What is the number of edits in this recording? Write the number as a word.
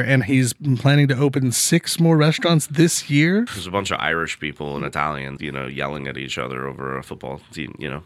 two